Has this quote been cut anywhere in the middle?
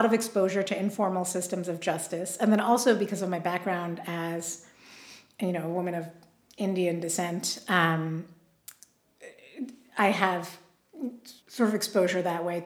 yes; 1 cut; at 11.4 s

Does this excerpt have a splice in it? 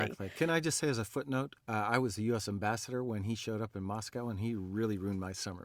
yes; 1 cut; at 1.6 s

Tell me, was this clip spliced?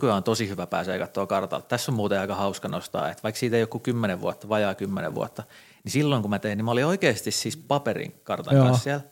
no; 0 cuts

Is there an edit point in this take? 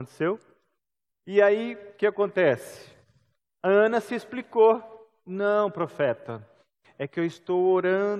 yes; 1 cut; at 1.1 s

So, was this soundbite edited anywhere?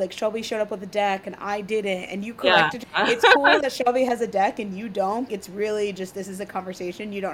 yes; 2 cuts; at 2.8 s, 5.3 s

